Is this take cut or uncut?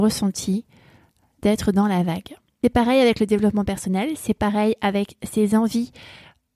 uncut